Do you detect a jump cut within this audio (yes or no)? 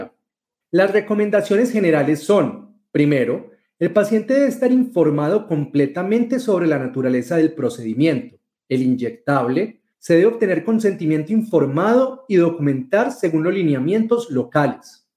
yes